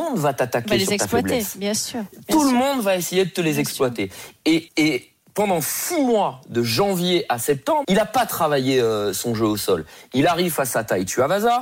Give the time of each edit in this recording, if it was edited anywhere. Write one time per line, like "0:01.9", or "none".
0:04.7
0:07.8